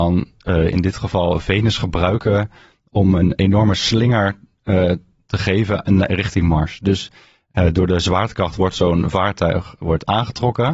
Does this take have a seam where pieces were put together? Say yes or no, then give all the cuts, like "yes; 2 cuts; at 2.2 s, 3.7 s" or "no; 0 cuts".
no; 0 cuts